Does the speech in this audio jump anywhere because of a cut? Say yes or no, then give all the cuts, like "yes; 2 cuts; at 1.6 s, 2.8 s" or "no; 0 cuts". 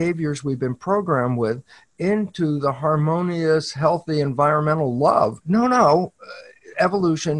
yes; 1 cut; at 5.4 s